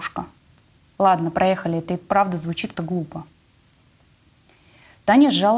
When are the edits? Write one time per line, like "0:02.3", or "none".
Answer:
0:02.7